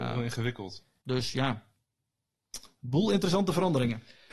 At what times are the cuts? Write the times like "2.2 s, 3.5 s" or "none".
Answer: 1.0 s